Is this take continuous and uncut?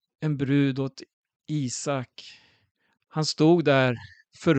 no; 1 cut; at 3.0 s

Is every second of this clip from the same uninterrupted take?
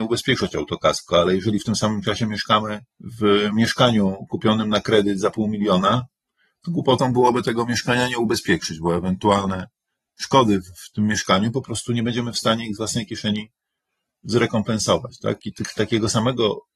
no; 1 cut; at 2.9 s

